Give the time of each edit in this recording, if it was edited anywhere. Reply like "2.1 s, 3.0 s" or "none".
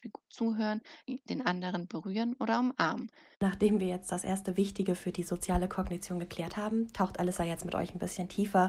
1.0 s, 3.3 s